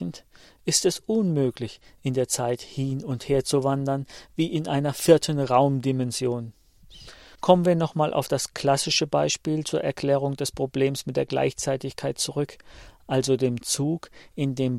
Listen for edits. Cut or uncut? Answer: cut